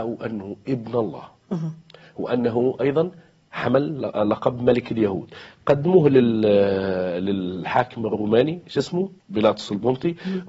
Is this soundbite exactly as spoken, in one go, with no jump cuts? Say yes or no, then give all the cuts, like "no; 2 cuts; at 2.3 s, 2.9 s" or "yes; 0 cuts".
no; 1 cut; at 9.2 s